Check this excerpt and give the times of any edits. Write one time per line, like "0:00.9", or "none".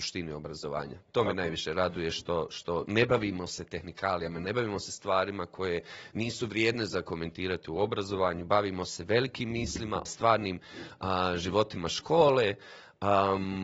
0:10.1